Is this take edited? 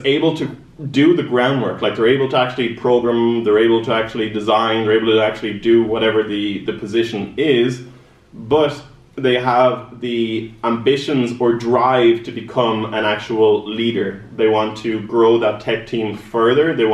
no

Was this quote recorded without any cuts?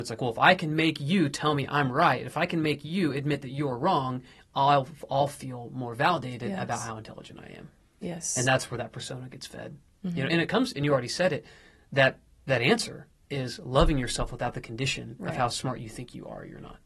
yes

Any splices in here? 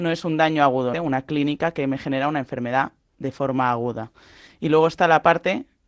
yes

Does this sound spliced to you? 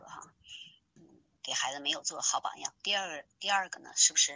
no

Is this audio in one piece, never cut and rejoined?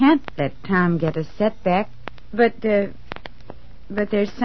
no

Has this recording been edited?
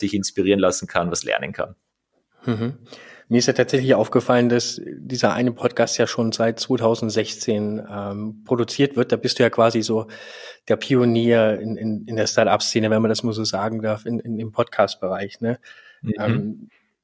no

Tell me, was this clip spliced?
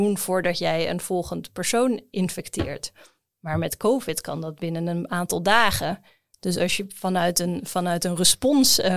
no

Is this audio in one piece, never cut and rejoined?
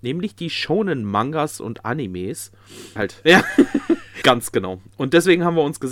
no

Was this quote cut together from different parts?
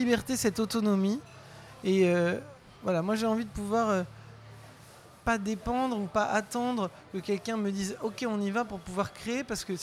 no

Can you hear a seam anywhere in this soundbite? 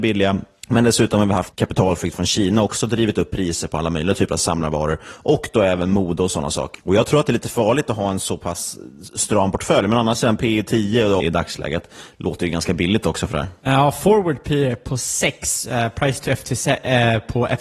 yes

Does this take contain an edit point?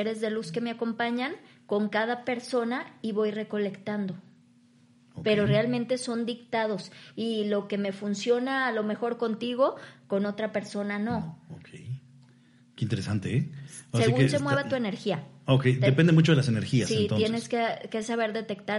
no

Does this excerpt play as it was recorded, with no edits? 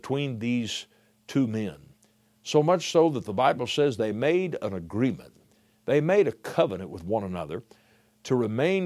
yes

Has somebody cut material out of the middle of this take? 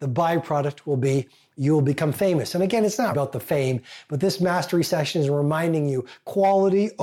yes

